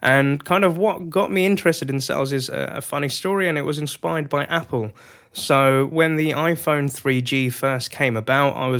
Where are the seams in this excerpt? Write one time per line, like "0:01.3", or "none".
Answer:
none